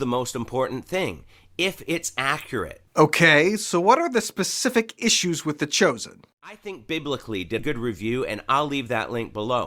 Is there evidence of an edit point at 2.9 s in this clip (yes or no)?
yes